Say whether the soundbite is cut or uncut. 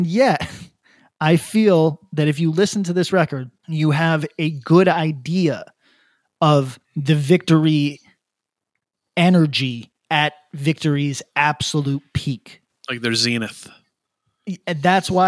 cut